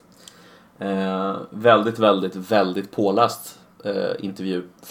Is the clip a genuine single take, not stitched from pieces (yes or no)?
yes